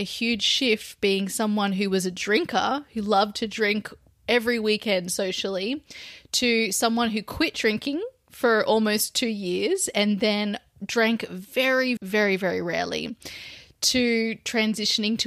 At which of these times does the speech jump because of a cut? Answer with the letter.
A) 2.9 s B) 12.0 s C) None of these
B